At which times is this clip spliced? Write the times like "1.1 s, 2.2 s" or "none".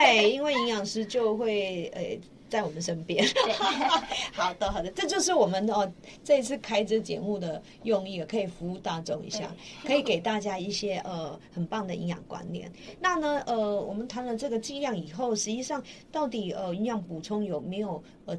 none